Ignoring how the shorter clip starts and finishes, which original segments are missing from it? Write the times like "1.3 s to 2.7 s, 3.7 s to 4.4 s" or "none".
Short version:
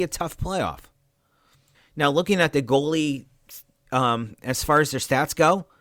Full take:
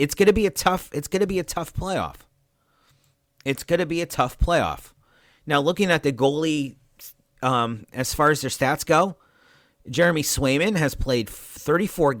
3.1 s to 5.2 s